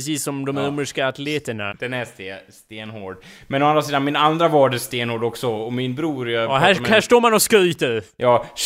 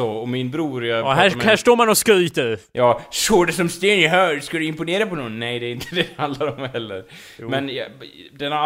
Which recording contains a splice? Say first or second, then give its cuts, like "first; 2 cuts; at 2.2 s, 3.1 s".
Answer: first; 1 cut; at 1.7 s